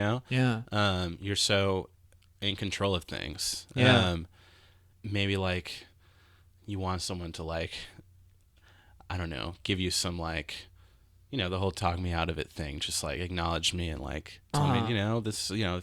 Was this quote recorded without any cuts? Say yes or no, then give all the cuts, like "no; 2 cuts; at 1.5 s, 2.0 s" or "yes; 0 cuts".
no; 1 cut; at 4.9 s